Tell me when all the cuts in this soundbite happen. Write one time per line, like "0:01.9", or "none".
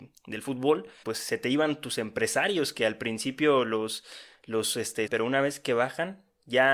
0:01.0
0:05.1

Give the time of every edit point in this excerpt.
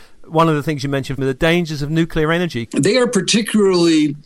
0:01.2
0:02.7

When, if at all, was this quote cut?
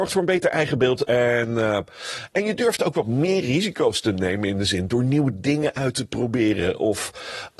0:01.1
0:02.3

